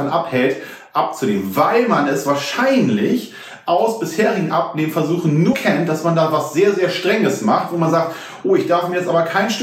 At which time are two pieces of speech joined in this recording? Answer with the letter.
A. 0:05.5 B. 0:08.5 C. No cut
A